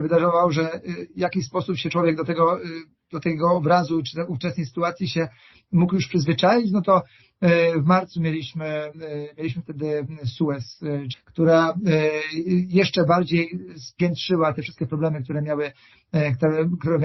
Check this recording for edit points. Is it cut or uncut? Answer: cut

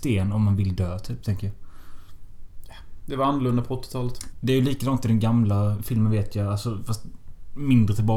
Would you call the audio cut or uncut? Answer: cut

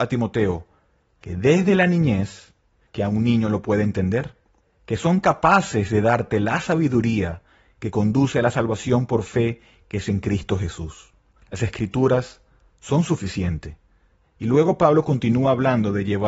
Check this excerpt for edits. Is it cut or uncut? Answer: cut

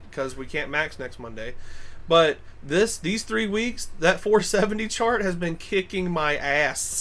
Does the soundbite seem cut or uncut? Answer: uncut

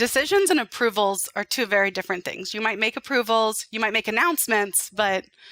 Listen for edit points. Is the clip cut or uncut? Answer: uncut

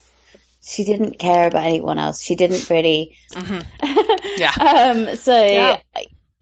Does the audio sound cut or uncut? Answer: cut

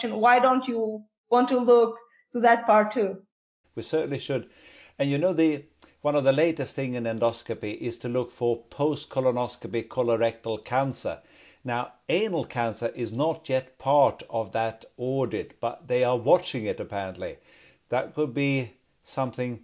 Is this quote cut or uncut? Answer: cut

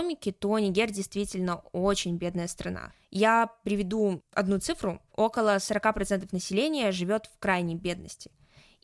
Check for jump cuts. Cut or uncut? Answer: uncut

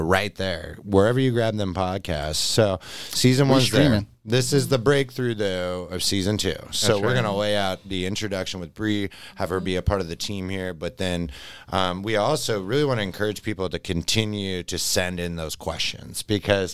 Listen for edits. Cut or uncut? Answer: uncut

